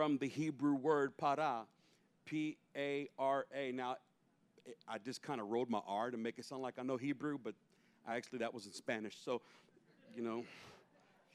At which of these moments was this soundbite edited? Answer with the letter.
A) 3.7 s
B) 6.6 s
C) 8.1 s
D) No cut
D